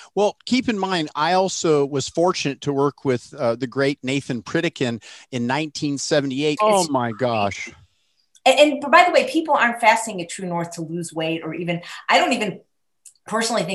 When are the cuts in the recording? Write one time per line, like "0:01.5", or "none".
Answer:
0:06.6